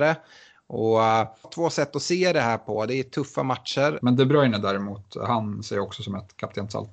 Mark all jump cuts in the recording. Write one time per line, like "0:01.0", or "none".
0:01.4
0:04.0